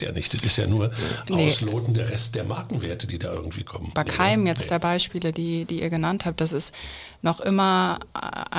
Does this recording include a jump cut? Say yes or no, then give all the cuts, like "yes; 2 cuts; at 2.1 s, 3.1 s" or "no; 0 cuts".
yes; 1 cut; at 3.9 s